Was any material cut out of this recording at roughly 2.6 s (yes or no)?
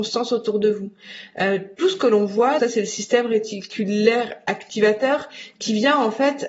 yes